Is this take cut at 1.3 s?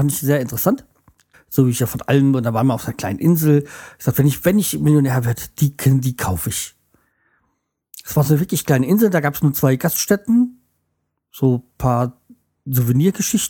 yes; 1 cut; at 1.3 s

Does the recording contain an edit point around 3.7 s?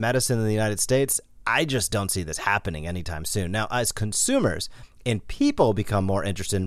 no; 0 cuts

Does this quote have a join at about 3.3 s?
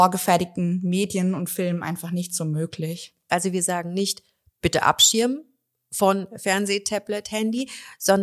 yes; 1 cut; at 3.3 s

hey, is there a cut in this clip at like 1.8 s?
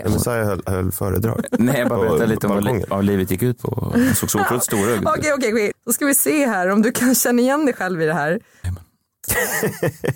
no; 2 cuts; at 5.7 s, 8.6 s

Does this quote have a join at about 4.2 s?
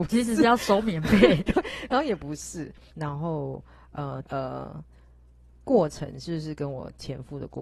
yes; 2 cuts; at 2.9 s, 4.2 s

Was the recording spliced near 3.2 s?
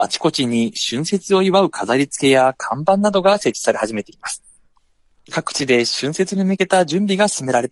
no; 1 cut; at 5.1 s

